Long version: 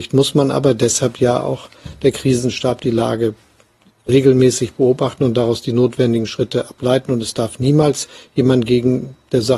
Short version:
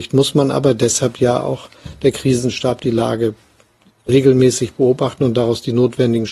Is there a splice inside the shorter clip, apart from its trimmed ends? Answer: no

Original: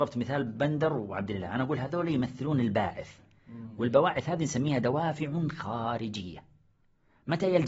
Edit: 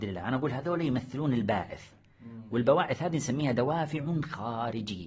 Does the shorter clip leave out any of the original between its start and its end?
no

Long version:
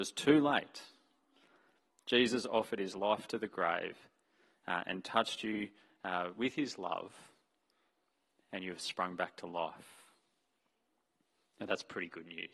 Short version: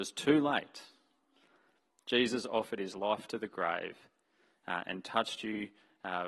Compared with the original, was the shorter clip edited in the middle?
no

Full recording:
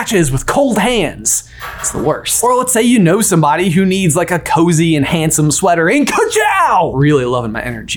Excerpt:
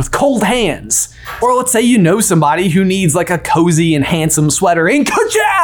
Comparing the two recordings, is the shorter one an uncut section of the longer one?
no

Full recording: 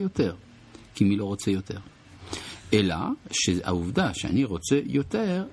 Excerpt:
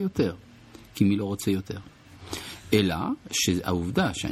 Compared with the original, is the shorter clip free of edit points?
yes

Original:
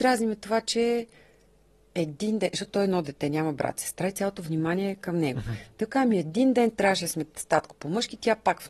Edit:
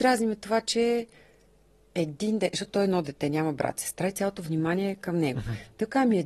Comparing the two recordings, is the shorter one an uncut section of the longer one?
yes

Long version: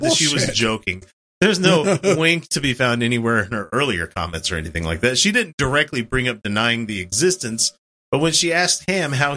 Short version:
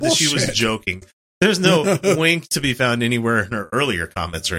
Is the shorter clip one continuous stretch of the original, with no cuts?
yes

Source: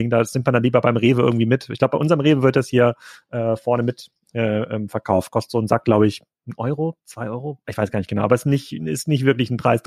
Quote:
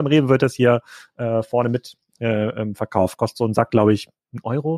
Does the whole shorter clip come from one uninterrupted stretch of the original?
yes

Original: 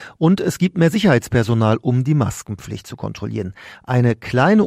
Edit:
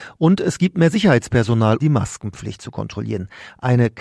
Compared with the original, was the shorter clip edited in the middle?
yes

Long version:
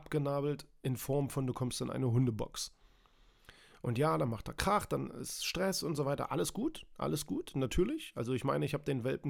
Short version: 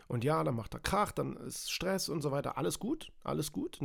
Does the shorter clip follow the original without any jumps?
yes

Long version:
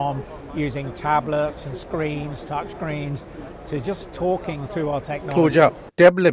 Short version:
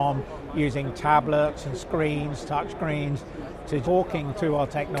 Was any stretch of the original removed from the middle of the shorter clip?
yes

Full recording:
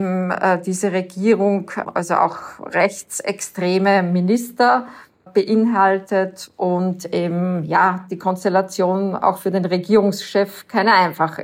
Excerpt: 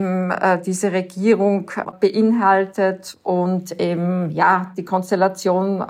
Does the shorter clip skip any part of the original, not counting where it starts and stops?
yes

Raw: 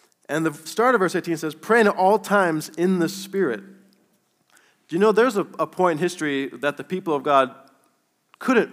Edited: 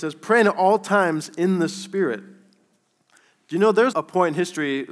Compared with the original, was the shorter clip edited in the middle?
yes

